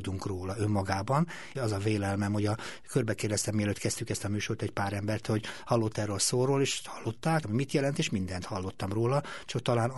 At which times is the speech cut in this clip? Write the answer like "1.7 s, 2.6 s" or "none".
1.6 s, 7.4 s